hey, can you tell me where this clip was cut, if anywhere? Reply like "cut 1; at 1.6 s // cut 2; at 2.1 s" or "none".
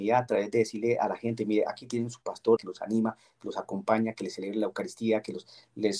cut 1; at 2.6 s